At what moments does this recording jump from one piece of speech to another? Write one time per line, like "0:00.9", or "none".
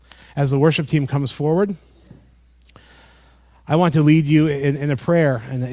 none